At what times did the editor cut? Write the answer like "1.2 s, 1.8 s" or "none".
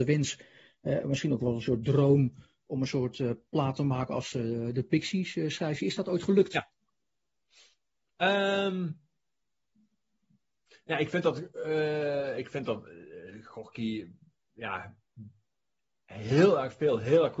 none

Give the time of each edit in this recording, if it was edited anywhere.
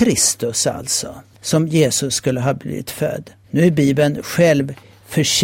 none

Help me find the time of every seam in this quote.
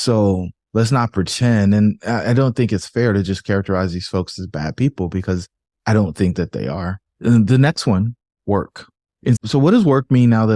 9.4 s

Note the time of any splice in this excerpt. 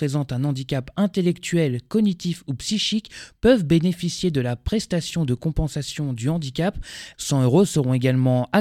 7.1 s

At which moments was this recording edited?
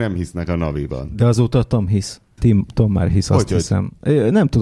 2.4 s

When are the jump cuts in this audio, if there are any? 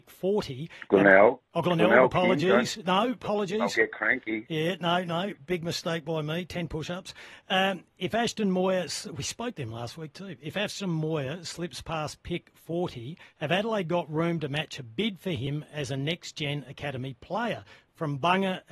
none

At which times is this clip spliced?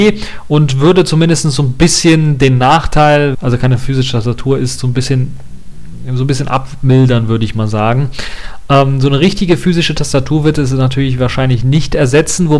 3.3 s

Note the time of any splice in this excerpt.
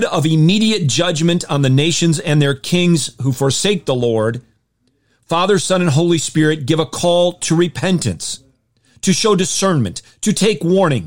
none

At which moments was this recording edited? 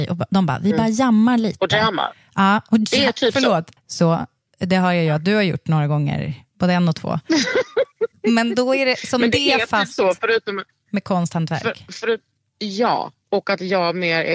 3.8 s

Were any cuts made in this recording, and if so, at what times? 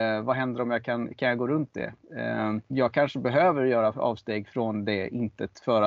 2.7 s

